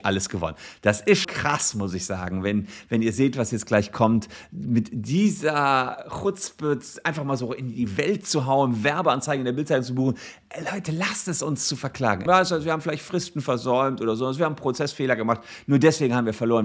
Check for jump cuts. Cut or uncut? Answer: cut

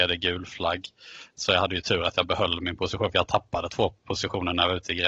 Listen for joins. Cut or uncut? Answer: uncut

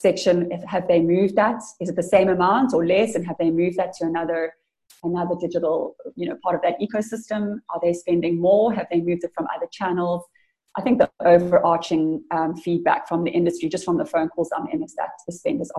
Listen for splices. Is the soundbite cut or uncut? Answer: uncut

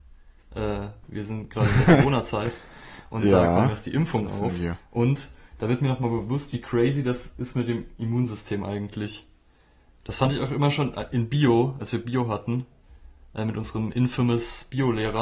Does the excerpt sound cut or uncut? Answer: uncut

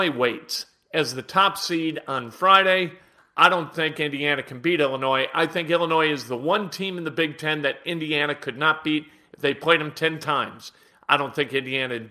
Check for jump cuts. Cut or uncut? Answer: uncut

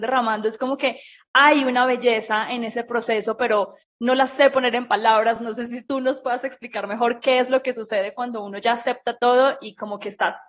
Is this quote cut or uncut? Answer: uncut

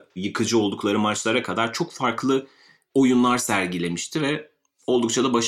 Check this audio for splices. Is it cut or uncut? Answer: uncut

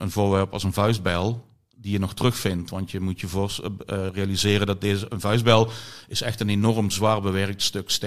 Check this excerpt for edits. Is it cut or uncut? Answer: uncut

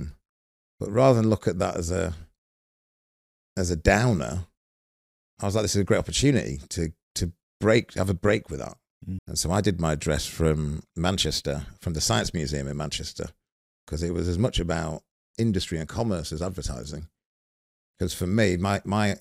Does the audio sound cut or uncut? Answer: cut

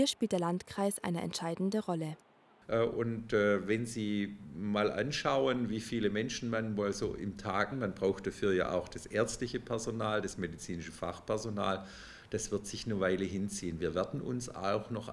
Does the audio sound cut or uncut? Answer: cut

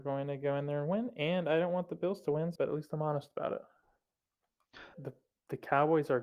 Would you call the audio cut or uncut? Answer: cut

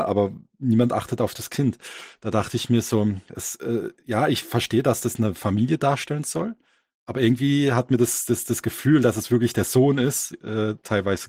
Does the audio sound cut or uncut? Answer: uncut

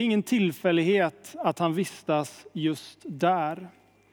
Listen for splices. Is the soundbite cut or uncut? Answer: uncut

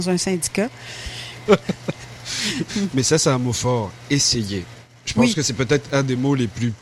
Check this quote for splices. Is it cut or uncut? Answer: cut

